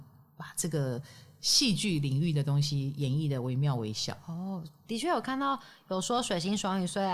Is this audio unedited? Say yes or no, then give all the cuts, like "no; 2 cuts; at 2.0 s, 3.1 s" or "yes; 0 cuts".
yes; 0 cuts